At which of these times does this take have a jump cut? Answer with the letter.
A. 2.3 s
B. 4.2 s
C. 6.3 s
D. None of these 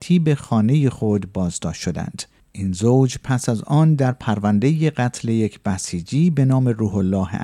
D